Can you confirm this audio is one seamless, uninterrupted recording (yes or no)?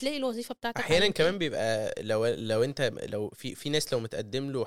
yes